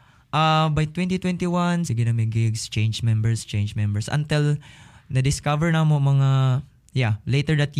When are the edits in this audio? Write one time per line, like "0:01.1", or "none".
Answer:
0:01.9